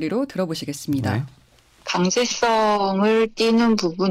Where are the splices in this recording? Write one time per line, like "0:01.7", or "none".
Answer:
none